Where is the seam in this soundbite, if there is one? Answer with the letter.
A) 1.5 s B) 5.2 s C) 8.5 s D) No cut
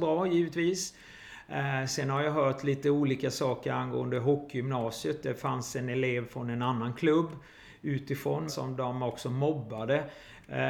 C